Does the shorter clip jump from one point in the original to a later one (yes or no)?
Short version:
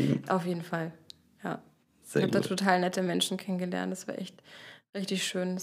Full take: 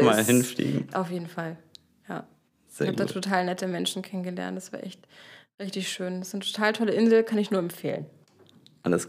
no